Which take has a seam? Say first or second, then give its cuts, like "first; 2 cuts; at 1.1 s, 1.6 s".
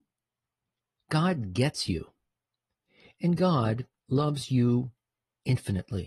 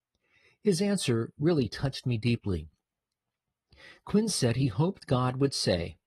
first; 1 cut; at 4.0 s